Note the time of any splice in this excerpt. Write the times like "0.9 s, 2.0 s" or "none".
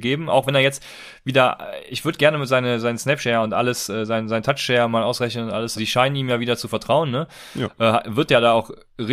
5.7 s